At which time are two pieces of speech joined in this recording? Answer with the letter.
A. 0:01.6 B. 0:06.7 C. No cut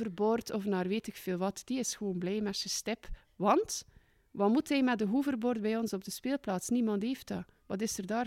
C